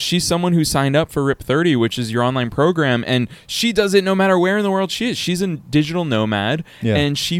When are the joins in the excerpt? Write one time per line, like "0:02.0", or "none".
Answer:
none